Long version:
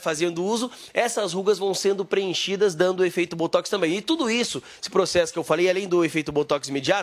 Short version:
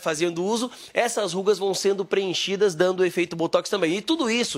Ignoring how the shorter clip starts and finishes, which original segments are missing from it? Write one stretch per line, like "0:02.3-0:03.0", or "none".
none